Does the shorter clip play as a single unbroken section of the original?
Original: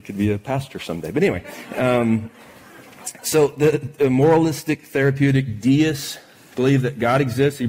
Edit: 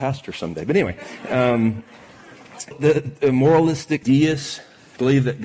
no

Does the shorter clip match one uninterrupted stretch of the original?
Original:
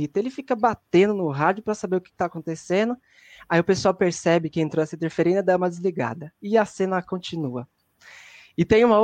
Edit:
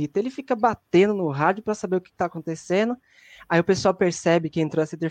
yes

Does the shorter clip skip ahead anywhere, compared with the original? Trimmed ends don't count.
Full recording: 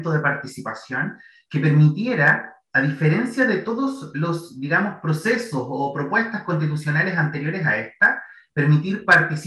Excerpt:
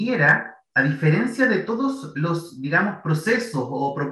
no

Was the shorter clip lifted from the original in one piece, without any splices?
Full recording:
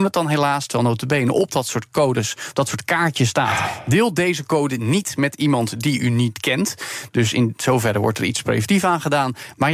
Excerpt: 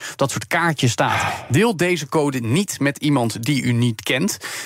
yes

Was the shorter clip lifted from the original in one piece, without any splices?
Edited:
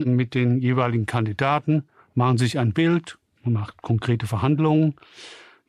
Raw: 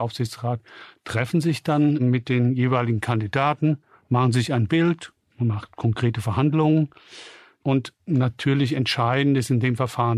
yes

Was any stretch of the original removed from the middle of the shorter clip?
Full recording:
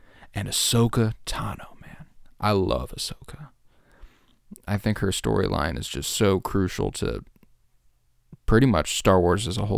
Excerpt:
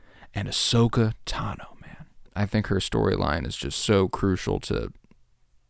yes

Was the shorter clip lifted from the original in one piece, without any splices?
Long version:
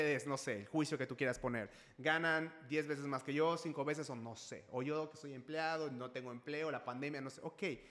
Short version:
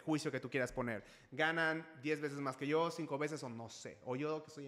yes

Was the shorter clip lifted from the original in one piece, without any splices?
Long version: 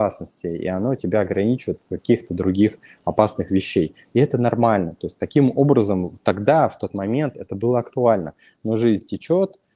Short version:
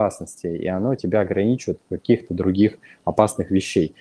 yes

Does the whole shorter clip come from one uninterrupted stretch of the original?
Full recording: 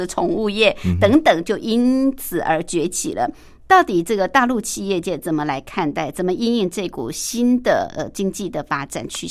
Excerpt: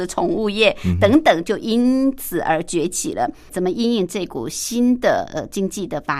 no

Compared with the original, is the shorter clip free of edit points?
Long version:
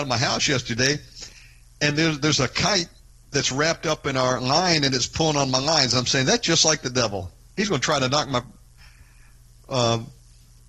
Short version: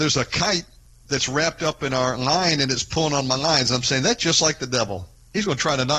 yes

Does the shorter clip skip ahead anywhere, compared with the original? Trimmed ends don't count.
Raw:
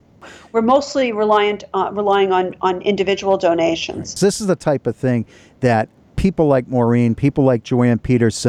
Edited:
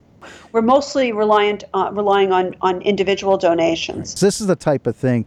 no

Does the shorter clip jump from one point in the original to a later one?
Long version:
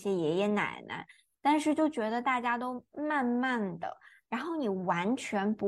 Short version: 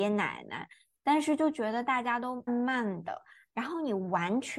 yes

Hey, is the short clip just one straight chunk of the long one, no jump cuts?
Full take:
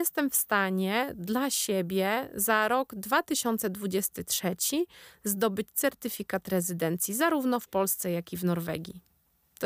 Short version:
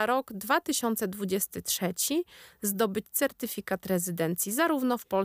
yes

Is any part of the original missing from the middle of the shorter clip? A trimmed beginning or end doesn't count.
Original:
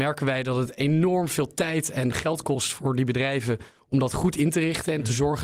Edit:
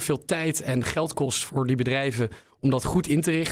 no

